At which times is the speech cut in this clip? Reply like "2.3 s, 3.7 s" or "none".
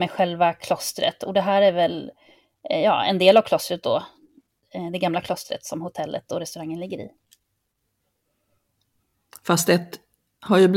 none